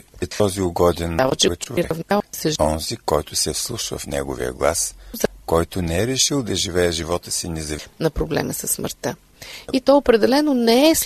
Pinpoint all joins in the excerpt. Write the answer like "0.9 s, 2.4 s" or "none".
5.4 s